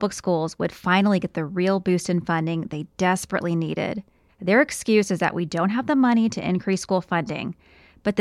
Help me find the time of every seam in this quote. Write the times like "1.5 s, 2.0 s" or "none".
4.3 s